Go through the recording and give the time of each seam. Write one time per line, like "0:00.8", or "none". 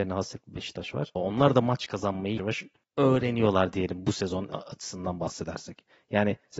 0:01.2
0:02.4